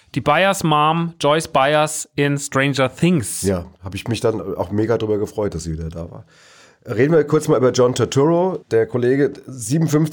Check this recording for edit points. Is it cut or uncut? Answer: uncut